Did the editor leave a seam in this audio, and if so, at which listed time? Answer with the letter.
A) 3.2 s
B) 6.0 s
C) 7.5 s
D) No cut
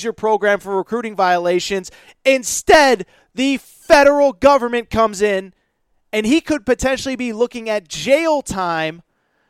D